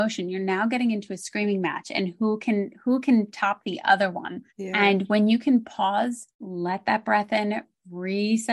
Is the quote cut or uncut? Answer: cut